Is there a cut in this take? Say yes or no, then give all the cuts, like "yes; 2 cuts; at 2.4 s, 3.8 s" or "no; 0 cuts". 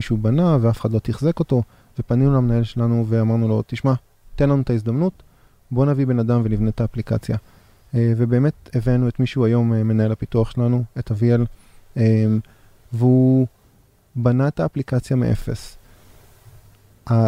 no; 0 cuts